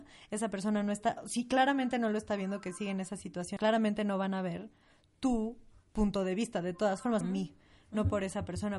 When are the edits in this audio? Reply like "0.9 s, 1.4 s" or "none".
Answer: 3.6 s, 7.2 s